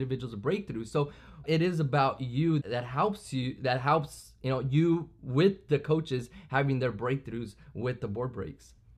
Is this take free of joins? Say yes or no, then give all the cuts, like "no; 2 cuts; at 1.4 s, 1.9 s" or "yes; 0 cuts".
no; 2 cuts; at 1.4 s, 2.6 s